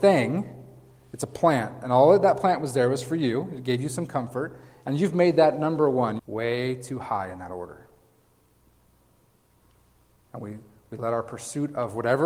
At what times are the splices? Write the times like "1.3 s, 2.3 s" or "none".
6.2 s